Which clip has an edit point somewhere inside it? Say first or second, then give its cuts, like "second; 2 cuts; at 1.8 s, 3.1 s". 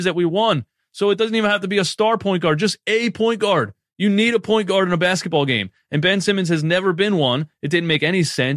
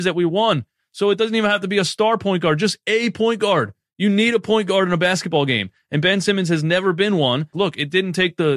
second; 1 cut; at 7.5 s